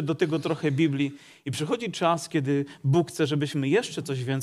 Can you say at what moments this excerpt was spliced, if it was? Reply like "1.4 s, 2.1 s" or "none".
none